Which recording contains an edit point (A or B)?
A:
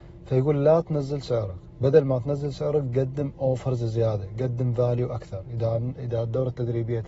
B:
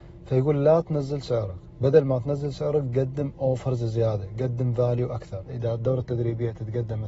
B